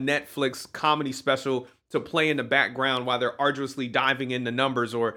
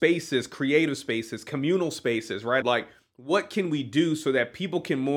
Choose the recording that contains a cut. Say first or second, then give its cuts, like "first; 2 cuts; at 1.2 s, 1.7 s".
second; 1 cut; at 2.6 s